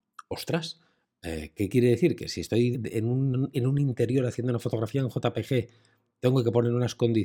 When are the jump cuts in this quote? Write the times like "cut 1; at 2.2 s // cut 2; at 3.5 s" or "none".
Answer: cut 1; at 2.7 s